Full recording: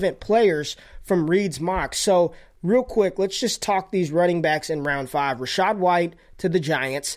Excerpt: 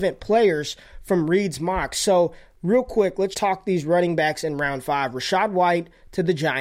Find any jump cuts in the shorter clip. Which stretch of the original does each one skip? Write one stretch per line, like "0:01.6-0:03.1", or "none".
0:03.3-0:03.6